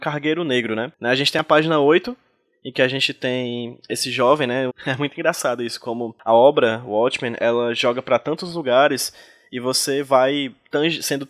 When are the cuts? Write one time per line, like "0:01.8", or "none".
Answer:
0:04.7